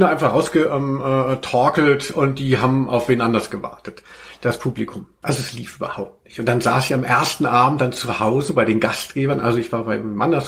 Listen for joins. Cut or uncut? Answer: cut